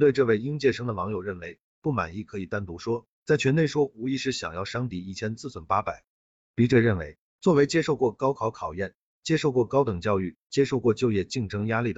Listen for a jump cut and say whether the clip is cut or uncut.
uncut